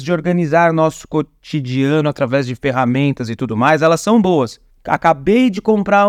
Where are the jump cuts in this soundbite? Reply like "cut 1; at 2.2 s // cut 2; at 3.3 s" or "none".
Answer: cut 1; at 4.7 s